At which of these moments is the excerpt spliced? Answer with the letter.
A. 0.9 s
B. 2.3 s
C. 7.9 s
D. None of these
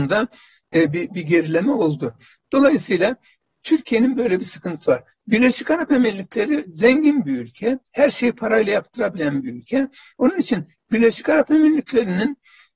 D